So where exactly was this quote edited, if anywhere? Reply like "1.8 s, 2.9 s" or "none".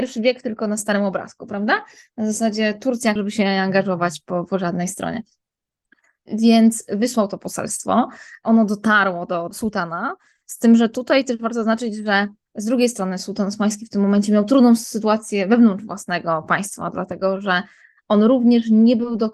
3.2 s